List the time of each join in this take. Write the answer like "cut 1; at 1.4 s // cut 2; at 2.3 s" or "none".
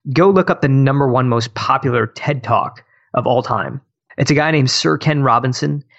cut 1; at 4.1 s